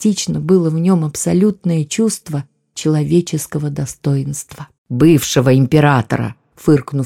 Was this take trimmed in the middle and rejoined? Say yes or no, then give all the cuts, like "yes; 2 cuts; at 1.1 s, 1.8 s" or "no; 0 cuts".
yes; 1 cut; at 4.8 s